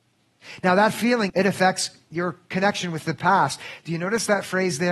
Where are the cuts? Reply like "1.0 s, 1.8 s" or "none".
1.3 s